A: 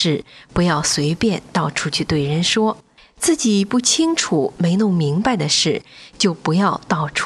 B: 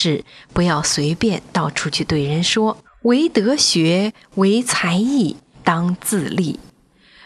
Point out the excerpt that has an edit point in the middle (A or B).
B